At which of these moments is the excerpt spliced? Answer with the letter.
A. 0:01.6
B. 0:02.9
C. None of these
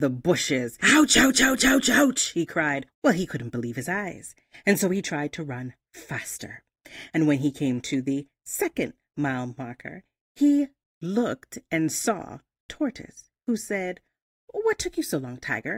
B